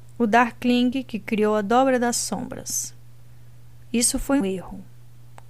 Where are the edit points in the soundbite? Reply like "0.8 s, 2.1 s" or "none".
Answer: 4.4 s

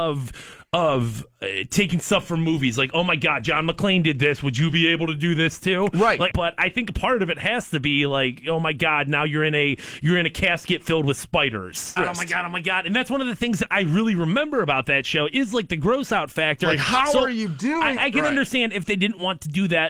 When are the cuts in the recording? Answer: 6.3 s, 12.0 s, 18.0 s

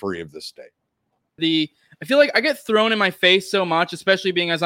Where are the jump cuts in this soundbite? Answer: 1.4 s

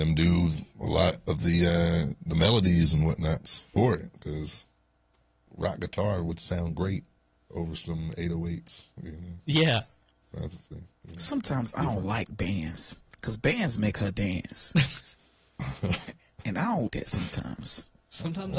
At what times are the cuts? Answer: 5.5 s, 13.1 s, 16.9 s

